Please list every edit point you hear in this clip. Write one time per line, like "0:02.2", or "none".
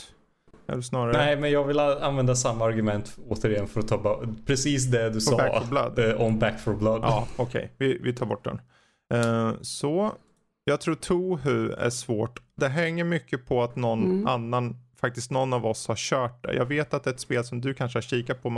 none